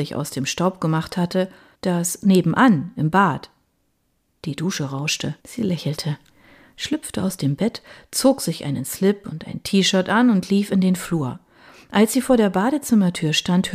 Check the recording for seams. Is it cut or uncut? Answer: cut